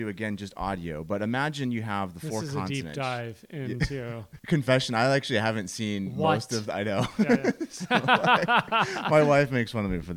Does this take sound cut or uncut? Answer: cut